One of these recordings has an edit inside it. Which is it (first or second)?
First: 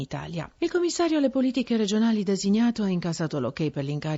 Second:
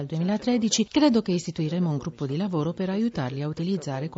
first